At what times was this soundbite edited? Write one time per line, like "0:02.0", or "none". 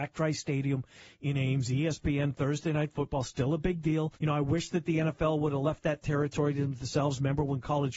0:04.2